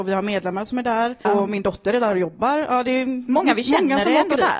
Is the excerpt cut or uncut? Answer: cut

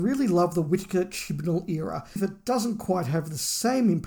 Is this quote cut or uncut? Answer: cut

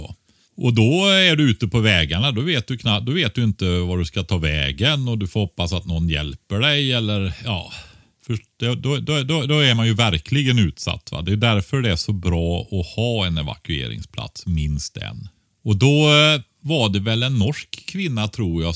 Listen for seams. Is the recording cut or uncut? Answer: uncut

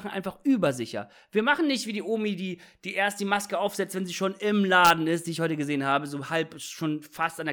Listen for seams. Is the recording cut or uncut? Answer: uncut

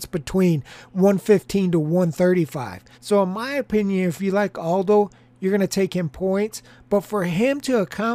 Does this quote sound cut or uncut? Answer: cut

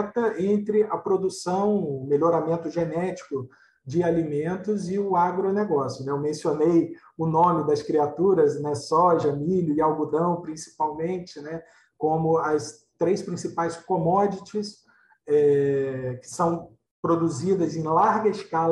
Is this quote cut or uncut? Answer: uncut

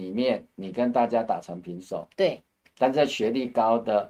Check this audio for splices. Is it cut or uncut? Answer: uncut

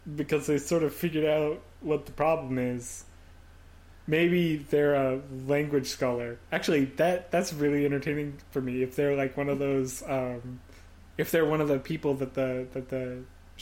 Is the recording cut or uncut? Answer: uncut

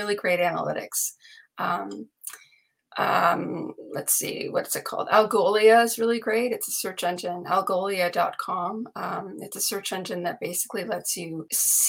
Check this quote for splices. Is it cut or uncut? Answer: uncut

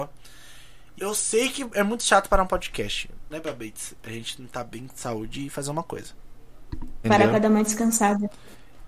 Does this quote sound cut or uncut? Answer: cut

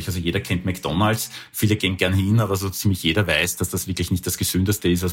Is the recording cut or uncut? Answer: uncut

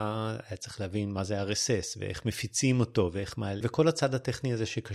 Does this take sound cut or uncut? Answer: cut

